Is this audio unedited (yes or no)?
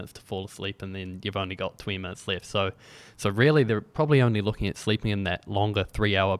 yes